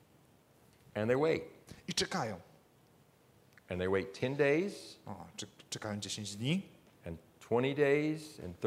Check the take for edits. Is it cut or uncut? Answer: uncut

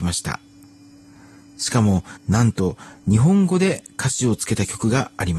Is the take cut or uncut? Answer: cut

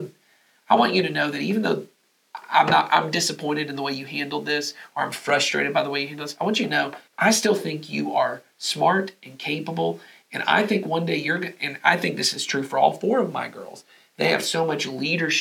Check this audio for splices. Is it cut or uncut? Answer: cut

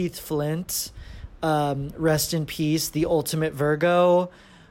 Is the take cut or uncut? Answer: uncut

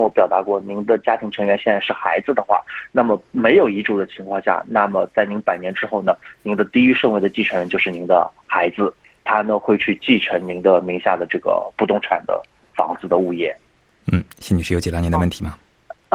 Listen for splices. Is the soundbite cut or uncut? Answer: uncut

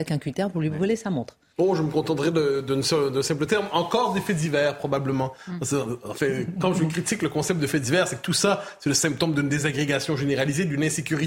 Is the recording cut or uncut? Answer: uncut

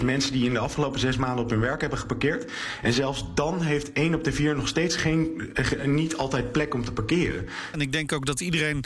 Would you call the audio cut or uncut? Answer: cut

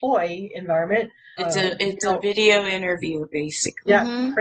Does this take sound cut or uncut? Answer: cut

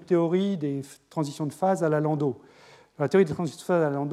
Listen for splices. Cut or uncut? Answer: uncut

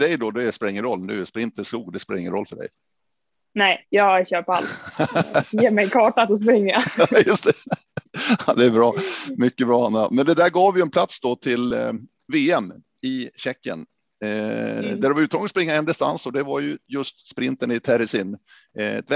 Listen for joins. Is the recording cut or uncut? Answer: uncut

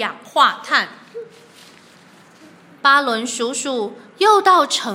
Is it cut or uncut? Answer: uncut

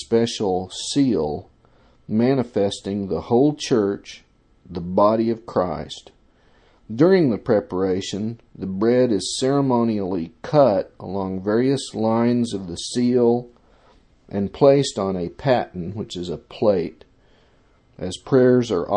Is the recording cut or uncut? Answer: uncut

